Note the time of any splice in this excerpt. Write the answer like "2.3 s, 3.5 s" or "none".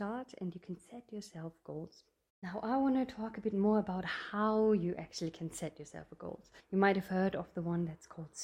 6.6 s